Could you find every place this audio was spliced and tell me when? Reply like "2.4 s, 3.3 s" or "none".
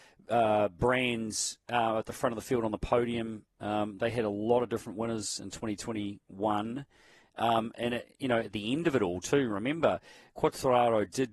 none